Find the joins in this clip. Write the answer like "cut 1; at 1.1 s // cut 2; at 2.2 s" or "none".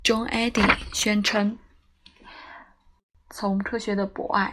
cut 1; at 3.2 s

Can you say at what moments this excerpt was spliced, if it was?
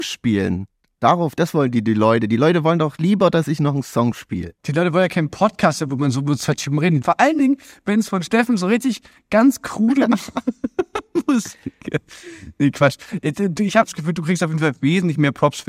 cut 1; at 4.6 s // cut 2; at 7.0 s

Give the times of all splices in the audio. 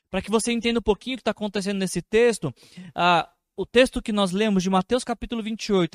none

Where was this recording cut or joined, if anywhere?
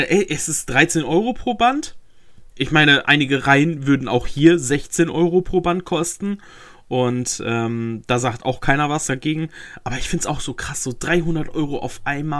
cut 1; at 2.5 s

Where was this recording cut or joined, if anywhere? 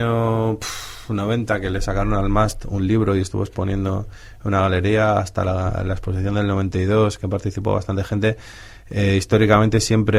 none

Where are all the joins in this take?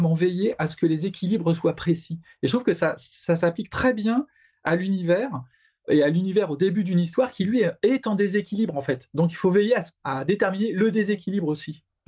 none

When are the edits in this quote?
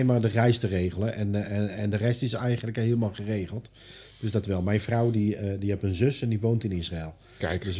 none

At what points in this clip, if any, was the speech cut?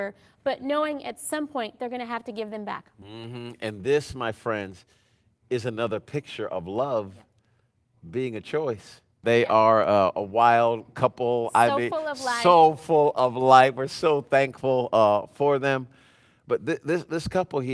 cut 1; at 9.2 s

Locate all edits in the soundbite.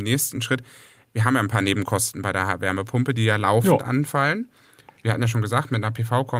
none

